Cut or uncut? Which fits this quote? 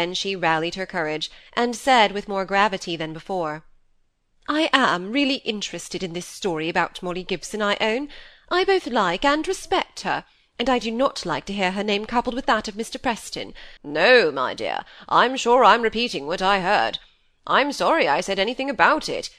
cut